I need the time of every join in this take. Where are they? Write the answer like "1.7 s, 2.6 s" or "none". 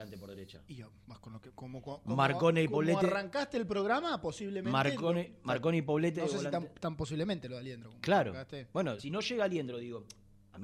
9.0 s